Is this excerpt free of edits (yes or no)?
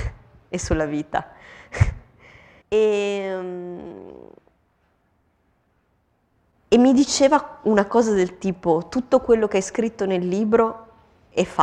no